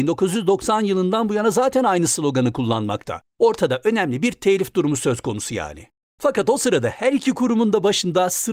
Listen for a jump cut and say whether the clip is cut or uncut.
uncut